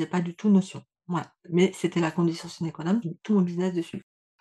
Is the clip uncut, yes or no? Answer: no